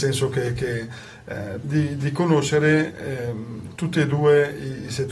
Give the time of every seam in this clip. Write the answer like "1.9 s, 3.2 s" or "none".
1.6 s